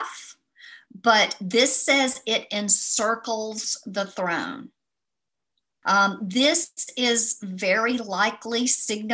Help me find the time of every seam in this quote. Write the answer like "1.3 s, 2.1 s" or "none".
5.8 s